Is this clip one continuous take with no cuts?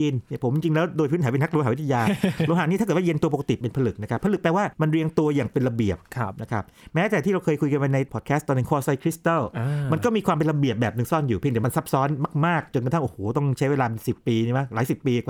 yes; 0 cuts

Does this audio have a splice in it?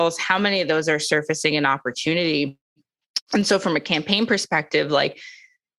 no; 0 cuts

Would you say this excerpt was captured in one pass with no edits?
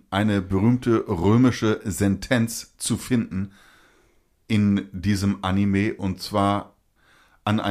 yes; 0 cuts

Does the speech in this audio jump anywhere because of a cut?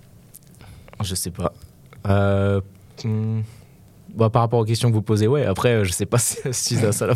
no; 0 cuts

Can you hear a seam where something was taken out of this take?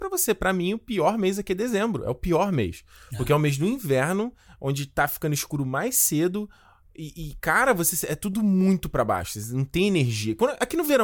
no; 0 cuts

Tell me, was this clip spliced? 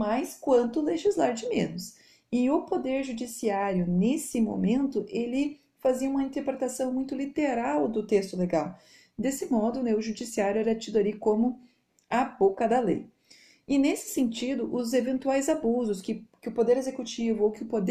no; 0 cuts

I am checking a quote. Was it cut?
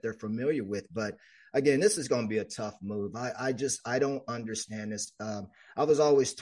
no; 0 cuts

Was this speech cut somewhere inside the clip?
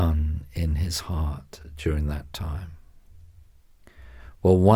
no; 0 cuts

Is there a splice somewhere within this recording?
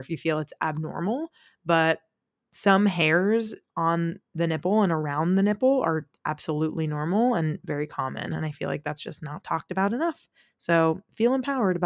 no; 0 cuts

